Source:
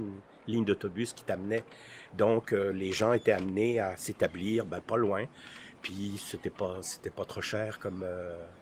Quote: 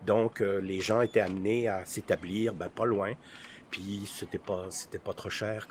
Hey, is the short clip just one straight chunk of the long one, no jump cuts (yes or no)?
yes